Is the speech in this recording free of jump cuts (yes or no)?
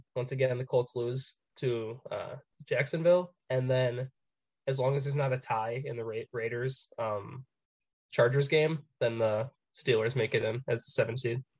yes